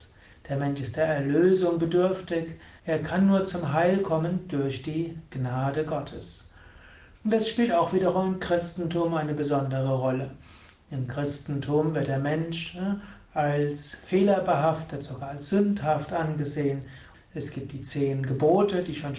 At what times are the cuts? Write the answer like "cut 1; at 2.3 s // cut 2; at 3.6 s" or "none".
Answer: cut 1; at 2.8 s // cut 2; at 7.2 s // cut 3; at 17.1 s